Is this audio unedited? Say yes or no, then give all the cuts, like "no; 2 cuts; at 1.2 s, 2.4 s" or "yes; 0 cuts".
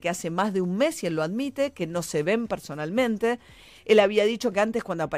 yes; 0 cuts